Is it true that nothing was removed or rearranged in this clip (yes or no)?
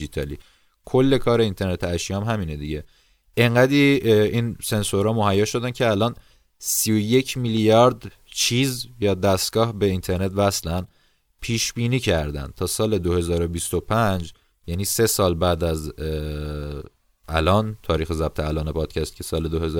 yes